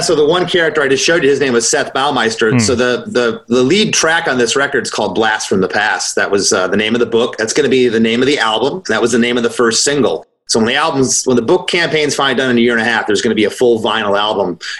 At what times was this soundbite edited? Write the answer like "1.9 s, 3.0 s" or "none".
none

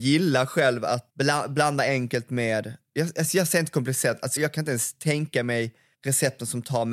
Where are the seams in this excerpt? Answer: 1.1 s, 4.4 s

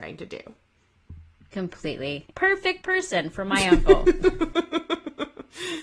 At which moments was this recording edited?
2.3 s

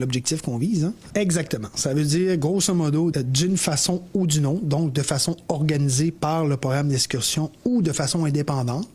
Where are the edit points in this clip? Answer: 1.1 s, 3.1 s

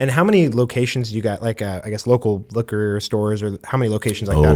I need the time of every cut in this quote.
none

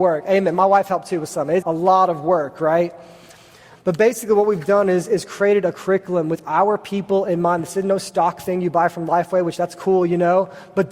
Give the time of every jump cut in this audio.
1.6 s

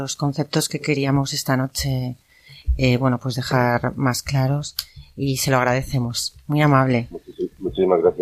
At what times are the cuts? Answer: none

